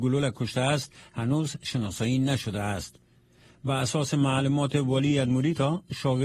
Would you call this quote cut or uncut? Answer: uncut